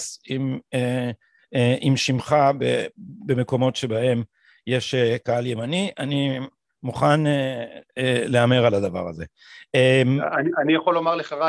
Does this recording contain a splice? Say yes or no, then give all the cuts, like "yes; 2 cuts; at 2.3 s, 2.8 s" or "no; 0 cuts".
no; 0 cuts